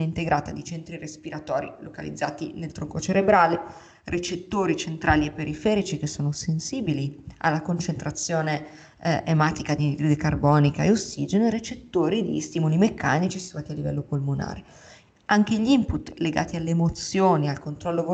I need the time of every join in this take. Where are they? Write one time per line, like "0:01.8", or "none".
none